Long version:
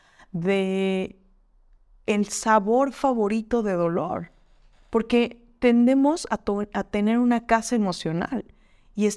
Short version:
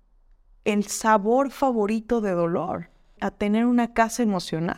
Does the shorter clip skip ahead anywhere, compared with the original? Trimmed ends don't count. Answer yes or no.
yes